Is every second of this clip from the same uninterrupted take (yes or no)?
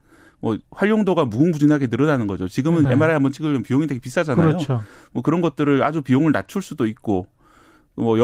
no